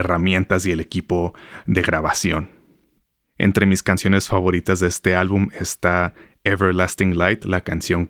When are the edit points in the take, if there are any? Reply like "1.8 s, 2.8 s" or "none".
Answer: none